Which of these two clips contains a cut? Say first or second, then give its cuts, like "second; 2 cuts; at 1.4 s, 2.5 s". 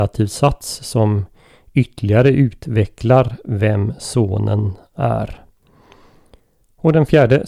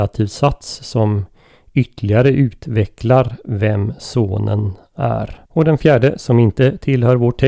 second; 1 cut; at 5.5 s